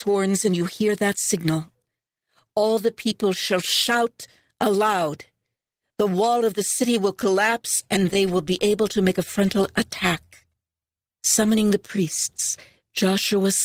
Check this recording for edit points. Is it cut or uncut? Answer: uncut